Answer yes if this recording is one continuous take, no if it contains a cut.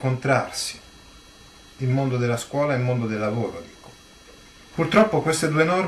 no